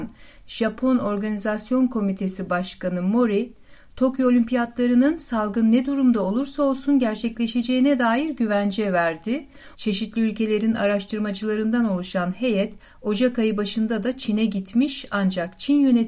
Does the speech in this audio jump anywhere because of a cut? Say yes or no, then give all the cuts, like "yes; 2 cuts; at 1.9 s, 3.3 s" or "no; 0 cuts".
yes; 1 cut; at 9.7 s